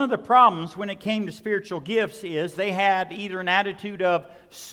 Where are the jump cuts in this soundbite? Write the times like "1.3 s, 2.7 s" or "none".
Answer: none